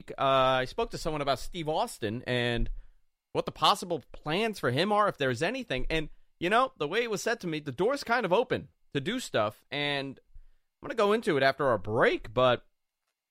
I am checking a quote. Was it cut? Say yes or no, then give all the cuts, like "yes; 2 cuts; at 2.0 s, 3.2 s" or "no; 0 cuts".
no; 0 cuts